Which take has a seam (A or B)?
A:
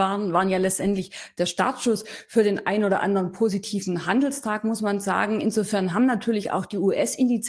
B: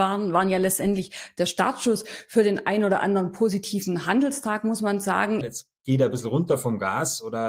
B